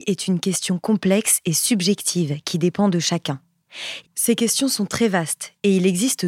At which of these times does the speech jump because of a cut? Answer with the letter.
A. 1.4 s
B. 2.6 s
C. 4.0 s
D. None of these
C